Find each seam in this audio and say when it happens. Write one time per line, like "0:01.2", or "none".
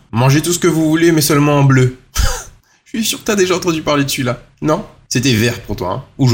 none